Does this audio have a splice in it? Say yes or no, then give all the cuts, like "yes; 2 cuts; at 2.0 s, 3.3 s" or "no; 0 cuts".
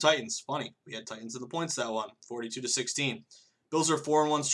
no; 0 cuts